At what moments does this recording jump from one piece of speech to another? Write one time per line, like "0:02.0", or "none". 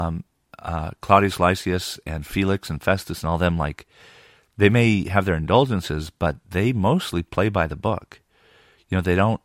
none